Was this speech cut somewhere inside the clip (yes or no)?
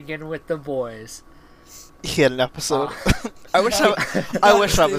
yes